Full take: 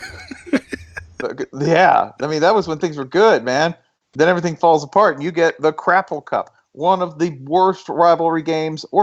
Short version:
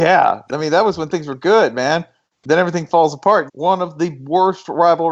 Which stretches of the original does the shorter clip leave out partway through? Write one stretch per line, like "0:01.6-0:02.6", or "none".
0:05.2-0:06.7